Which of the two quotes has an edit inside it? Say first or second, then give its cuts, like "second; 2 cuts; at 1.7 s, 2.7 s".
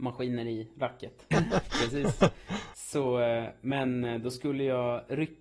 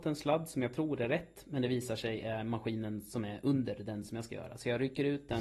first; 1 cut; at 1.3 s